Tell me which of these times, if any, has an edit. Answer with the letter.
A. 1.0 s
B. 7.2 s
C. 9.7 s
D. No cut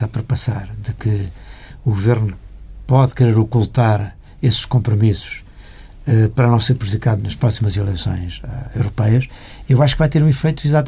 B